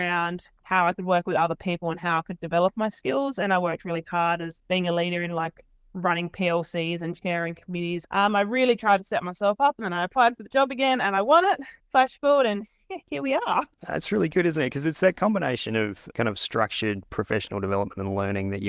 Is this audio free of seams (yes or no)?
yes